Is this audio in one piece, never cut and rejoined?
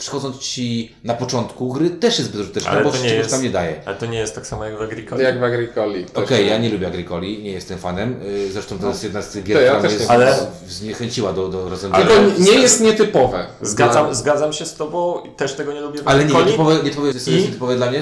no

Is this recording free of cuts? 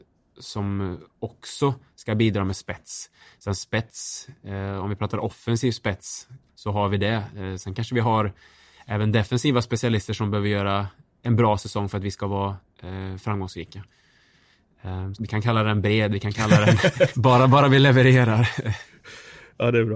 no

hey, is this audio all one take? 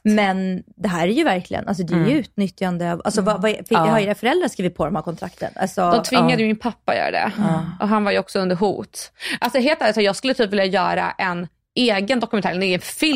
yes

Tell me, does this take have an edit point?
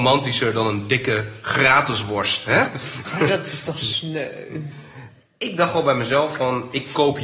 no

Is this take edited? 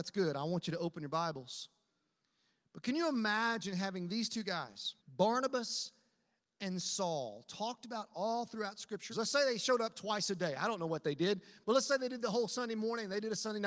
yes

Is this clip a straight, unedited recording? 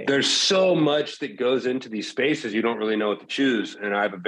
yes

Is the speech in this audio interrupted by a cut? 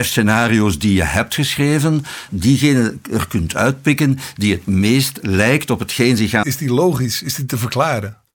yes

